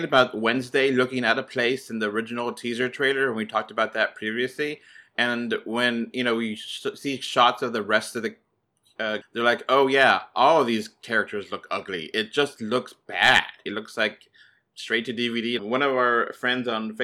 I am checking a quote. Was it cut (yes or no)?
yes